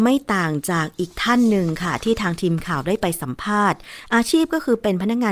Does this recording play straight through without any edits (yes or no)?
yes